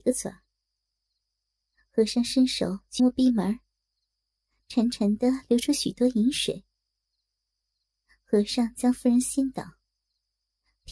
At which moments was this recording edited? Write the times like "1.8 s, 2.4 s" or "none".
3.0 s